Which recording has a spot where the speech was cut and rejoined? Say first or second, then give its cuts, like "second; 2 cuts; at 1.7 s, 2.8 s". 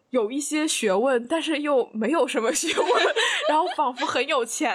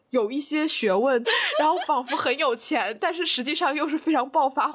second; 1 cut; at 1.2 s